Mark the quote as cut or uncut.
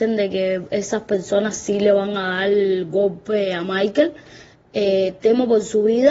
uncut